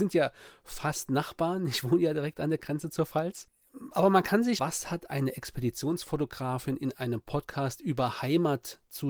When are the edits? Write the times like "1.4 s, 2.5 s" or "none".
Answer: 4.6 s